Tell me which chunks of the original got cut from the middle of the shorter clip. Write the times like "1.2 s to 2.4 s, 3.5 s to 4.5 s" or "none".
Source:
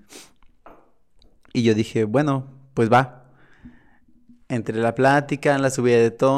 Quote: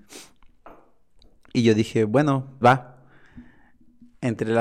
2.6 s to 2.9 s